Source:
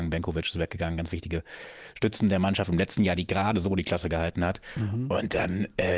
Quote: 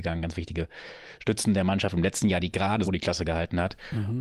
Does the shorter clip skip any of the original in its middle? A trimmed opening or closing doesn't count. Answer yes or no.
yes